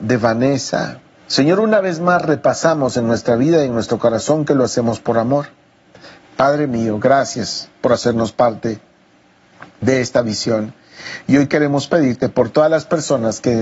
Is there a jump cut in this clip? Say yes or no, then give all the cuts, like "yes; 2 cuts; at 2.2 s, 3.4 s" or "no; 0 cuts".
yes; 2 cuts; at 1.2 s, 6.2 s